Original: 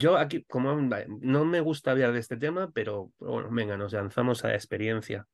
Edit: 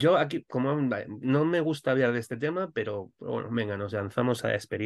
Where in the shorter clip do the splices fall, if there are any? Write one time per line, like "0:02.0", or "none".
none